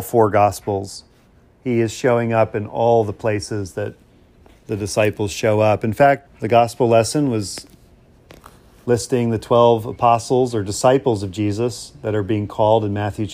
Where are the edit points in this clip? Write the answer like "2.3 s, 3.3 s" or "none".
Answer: 6.3 s